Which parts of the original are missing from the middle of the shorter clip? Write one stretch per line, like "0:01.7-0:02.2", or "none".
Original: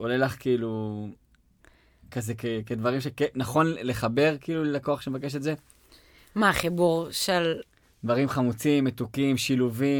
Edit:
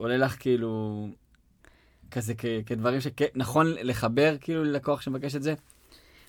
none